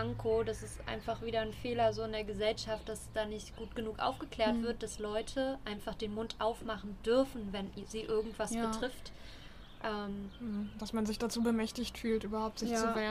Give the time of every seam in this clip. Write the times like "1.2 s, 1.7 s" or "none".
none

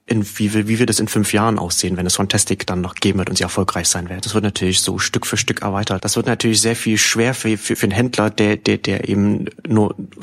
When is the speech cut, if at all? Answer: 4.2 s, 6.0 s, 7.8 s

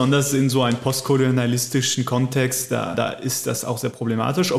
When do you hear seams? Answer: 2.9 s

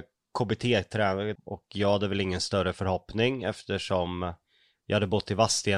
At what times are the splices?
1.4 s

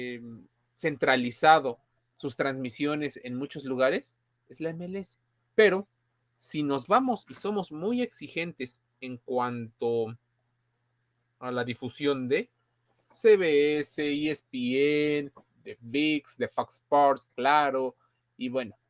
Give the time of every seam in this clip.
5.4 s, 15.5 s, 17.3 s

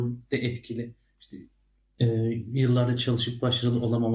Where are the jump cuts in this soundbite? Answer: none

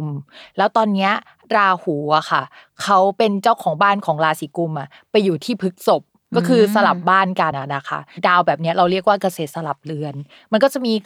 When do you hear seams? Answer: 7.5 s

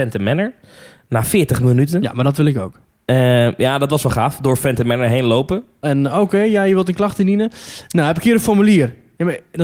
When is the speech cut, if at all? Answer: 5.8 s

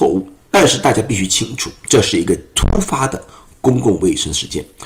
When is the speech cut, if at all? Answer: none

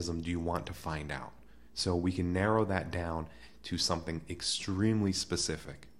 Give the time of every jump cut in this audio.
none

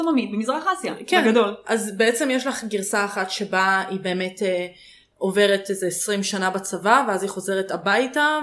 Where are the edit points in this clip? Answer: none

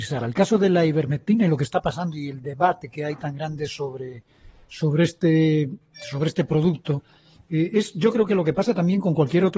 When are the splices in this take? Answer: none

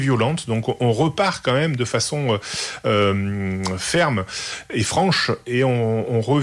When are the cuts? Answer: none

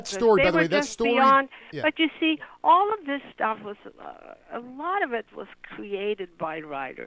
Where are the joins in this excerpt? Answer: none

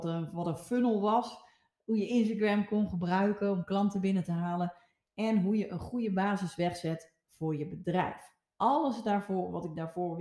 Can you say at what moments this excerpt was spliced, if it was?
none

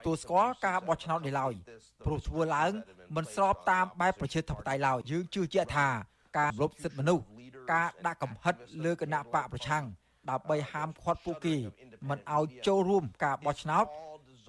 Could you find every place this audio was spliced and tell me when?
5.0 s, 6.5 s

